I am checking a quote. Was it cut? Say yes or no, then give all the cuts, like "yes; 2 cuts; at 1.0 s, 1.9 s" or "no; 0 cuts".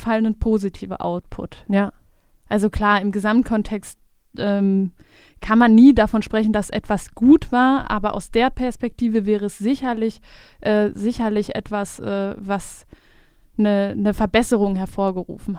no; 0 cuts